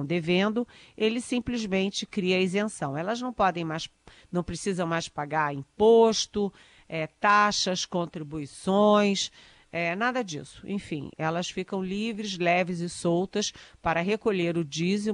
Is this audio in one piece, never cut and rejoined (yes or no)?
yes